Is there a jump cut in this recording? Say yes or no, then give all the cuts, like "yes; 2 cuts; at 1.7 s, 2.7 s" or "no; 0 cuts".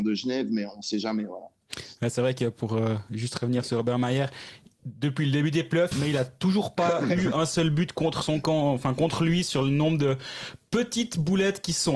yes; 1 cut; at 5.9 s